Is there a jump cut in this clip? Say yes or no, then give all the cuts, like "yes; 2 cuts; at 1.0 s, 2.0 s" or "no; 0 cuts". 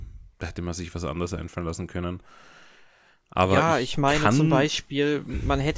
no; 0 cuts